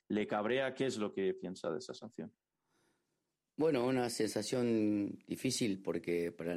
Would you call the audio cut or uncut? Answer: uncut